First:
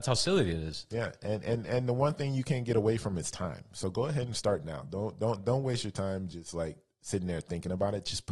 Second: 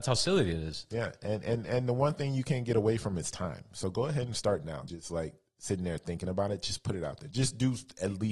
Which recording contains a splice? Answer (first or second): second